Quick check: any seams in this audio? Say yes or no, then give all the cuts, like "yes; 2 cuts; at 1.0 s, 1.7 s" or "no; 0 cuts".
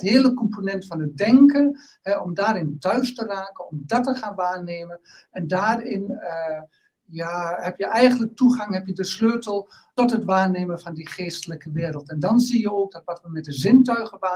no; 0 cuts